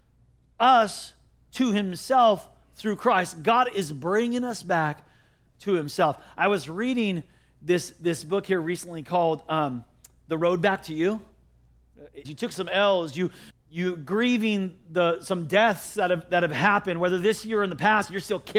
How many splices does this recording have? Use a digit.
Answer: 2